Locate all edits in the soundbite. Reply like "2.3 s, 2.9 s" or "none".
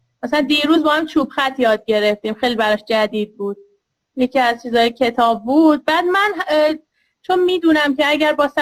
none